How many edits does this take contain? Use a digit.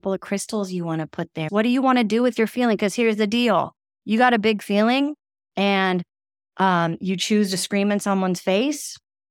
1